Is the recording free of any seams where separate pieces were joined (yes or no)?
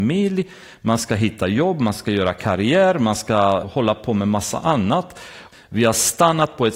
no